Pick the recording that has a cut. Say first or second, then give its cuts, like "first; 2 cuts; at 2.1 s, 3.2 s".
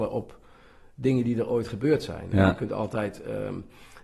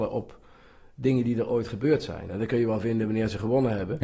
second; 1 cut; at 2.3 s